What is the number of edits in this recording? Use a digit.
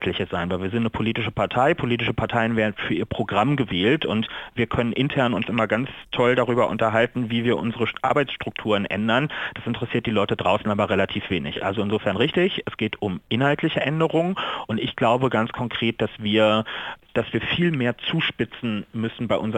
0